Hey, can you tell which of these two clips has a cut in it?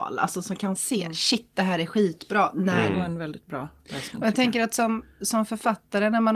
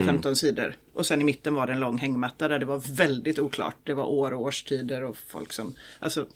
first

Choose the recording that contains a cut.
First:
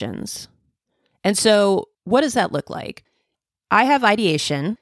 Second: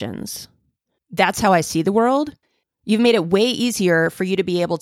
second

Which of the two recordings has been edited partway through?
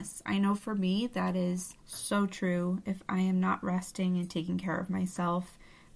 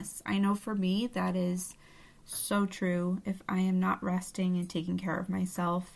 first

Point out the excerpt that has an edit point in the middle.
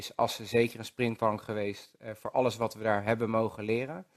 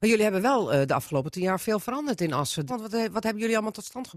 second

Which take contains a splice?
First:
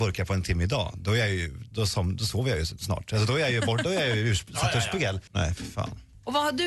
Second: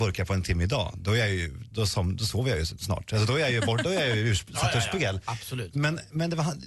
first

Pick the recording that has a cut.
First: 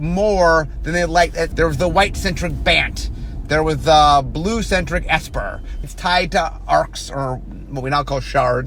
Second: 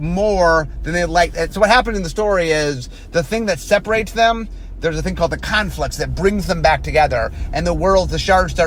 first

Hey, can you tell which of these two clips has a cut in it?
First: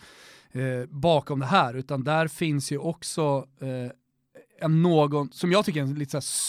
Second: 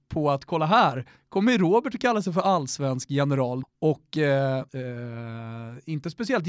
second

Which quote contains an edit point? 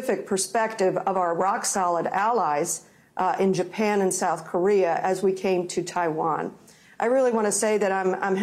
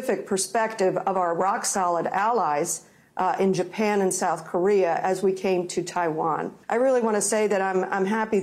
second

